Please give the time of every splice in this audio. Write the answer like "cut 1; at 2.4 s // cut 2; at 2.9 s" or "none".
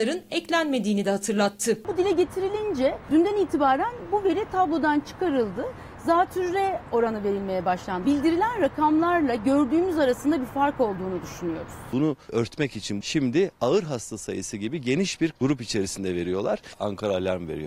none